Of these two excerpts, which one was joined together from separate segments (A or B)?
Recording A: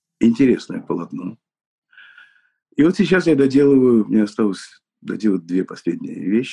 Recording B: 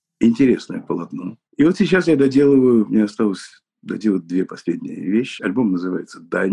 B